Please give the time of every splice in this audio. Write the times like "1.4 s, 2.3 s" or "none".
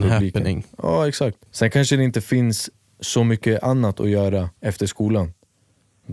1.5 s, 4.6 s